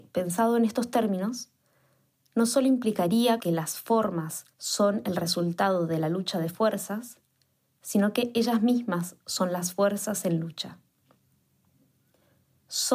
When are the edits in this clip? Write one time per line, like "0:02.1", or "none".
0:03.4
0:04.5